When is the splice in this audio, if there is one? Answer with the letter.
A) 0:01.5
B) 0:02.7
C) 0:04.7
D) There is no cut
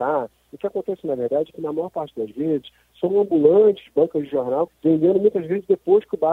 C